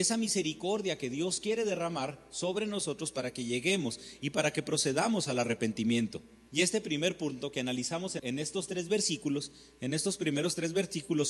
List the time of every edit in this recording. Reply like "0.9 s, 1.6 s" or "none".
6.5 s, 8.2 s